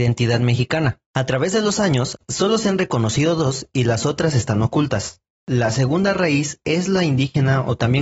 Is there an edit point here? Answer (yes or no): yes